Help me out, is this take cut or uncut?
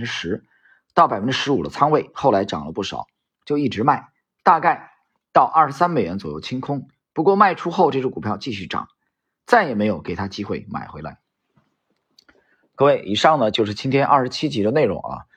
uncut